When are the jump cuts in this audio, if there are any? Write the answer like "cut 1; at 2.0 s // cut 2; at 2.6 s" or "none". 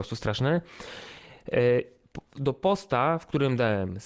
none